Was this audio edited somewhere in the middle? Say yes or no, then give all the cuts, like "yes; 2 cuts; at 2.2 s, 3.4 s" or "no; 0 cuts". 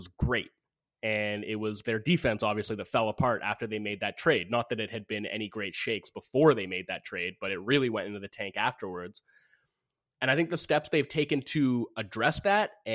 no; 0 cuts